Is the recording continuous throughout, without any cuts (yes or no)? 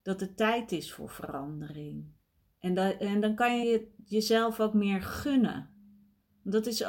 no